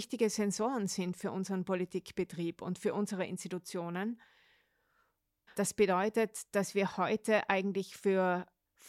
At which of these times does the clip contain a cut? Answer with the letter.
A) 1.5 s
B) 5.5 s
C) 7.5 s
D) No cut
B